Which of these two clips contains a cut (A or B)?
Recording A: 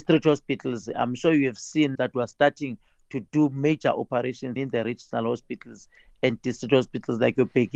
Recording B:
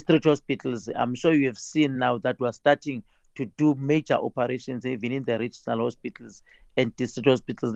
A